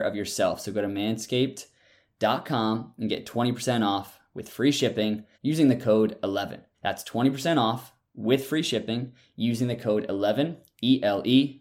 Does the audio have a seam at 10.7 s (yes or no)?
no